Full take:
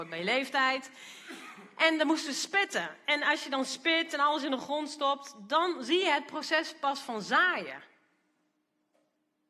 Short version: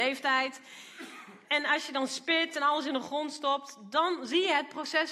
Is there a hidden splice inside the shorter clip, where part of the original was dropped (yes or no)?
yes